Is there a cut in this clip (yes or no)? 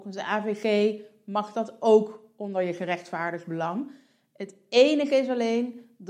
no